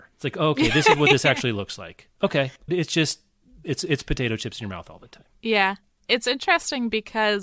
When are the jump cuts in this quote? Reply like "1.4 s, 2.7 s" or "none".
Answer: 2.7 s